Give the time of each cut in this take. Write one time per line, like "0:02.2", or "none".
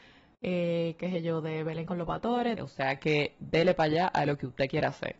0:02.6